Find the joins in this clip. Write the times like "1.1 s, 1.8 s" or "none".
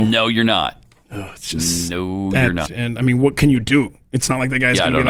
2.6 s